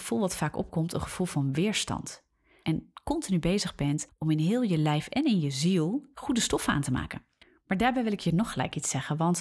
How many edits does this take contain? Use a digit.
2